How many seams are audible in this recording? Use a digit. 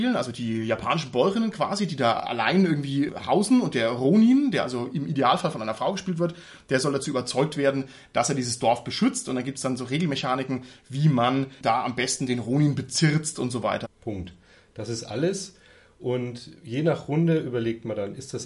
1